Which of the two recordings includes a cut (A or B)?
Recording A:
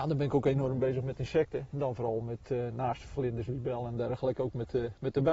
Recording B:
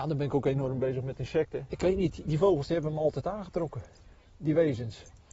B